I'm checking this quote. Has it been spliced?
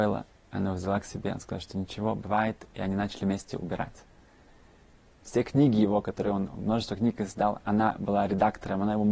yes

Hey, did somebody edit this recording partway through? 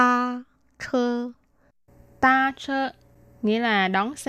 no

